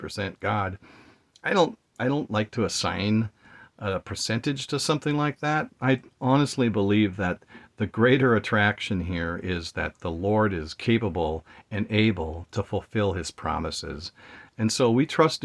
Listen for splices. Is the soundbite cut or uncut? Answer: cut